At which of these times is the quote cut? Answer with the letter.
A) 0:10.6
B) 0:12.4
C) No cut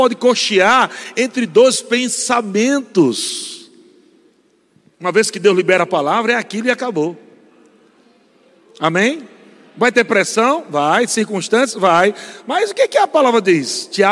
C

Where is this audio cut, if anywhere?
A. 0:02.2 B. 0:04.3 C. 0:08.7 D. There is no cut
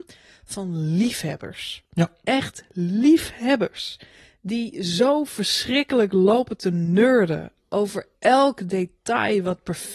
D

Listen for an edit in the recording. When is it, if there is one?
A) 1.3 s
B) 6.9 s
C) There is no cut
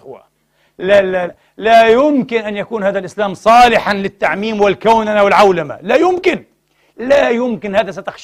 A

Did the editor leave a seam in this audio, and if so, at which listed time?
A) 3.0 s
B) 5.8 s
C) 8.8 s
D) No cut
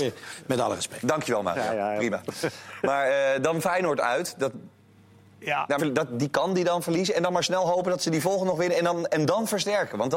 B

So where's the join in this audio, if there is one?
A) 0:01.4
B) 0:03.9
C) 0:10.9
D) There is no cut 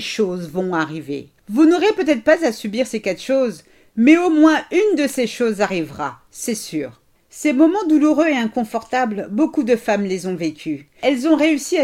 A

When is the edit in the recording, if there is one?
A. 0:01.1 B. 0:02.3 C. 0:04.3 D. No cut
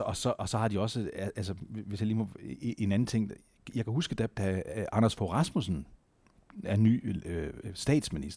C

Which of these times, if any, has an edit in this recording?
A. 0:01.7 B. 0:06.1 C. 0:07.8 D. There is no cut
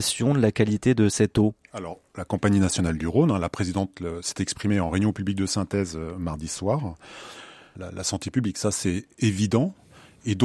C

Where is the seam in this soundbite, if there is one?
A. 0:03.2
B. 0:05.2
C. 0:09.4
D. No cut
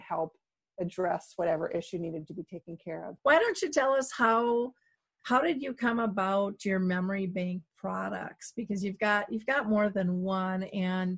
A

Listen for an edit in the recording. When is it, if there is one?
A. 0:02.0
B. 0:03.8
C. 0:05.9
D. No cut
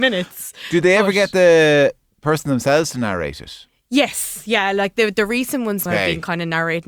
C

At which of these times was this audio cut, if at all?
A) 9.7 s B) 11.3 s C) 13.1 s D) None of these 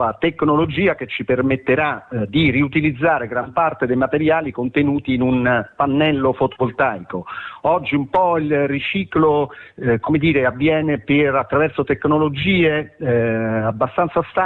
D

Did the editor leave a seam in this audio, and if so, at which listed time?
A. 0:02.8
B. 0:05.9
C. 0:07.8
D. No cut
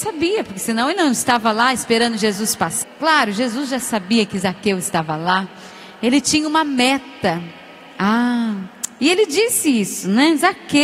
A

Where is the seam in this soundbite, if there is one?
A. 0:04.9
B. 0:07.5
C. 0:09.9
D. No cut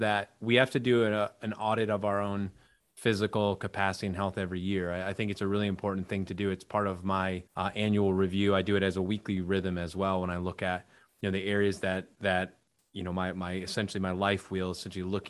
B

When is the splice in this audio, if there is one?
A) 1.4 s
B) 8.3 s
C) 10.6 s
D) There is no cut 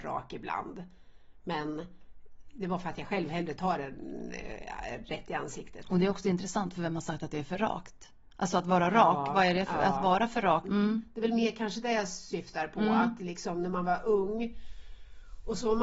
C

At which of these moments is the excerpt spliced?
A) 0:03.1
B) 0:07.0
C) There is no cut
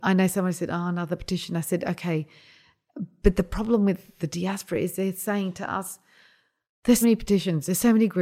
B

